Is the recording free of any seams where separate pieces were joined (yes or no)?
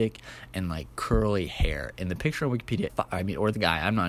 no